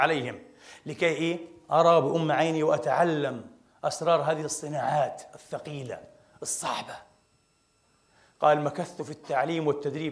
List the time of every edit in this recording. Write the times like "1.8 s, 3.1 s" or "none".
none